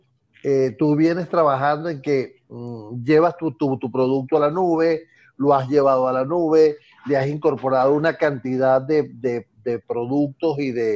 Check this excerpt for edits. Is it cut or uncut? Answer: uncut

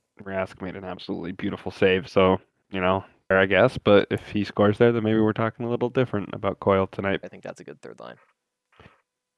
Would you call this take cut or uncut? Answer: cut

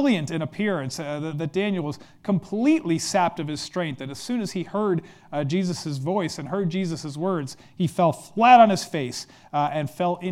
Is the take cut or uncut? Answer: uncut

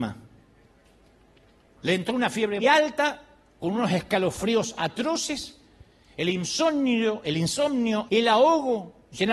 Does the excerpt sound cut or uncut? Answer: cut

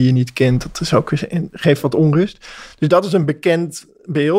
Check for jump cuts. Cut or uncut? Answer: uncut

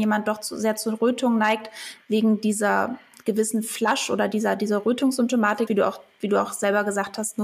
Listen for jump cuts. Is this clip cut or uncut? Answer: cut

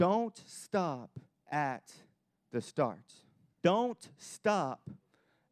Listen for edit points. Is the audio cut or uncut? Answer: cut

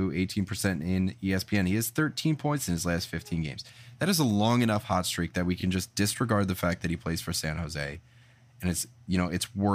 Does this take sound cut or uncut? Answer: uncut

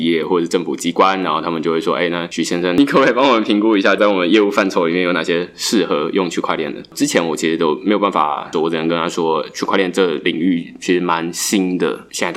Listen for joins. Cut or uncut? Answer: cut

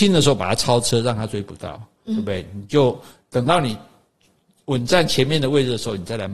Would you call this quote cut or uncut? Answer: uncut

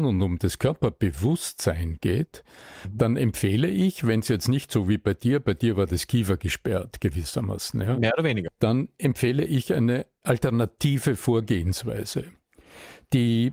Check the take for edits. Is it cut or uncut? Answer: uncut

